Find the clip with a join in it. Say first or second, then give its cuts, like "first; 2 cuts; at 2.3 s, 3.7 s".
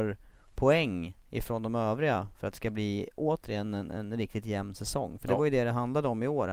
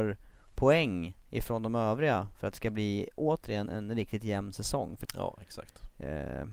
second; 2 cuts; at 3.7 s, 5.0 s